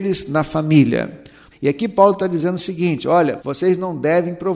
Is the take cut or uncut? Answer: cut